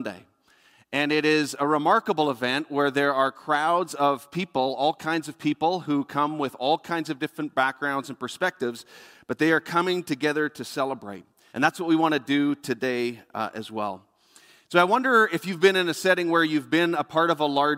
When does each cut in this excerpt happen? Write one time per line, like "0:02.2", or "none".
0:11.5